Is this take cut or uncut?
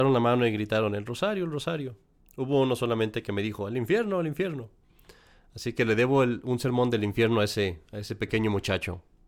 uncut